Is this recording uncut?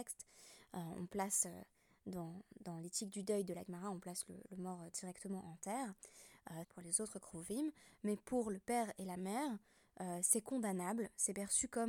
no; 1 cut; at 6.6 s

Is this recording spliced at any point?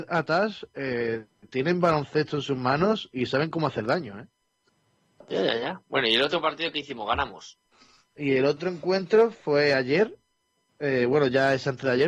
no; 0 cuts

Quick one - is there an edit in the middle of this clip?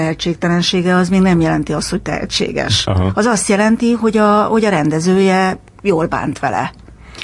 no; 0 cuts

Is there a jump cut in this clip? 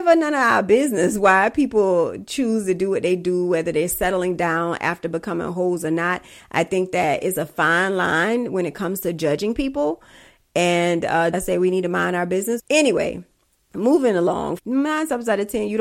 yes; 3 cuts; at 11.3 s, 12.6 s, 14.6 s

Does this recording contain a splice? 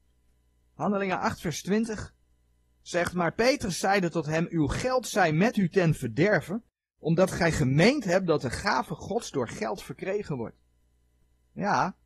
no; 0 cuts

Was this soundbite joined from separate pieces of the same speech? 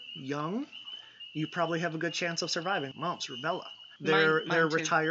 yes; 2 cuts; at 2.9 s, 4.0 s

